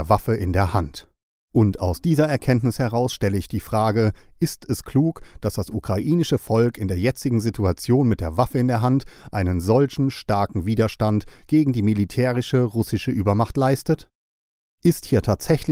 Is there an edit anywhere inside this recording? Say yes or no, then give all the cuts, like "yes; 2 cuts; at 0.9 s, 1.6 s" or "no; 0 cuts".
yes; 1 cut; at 1.4 s